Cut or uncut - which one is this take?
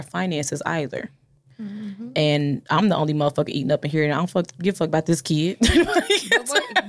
uncut